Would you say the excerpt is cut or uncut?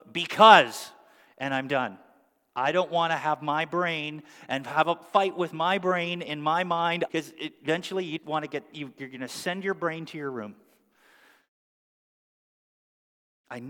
cut